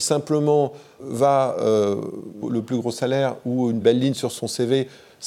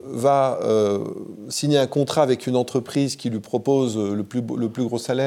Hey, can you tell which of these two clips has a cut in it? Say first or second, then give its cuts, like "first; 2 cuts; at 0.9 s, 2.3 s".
first; 3 cuts; at 1.0 s, 2.4 s, 3.8 s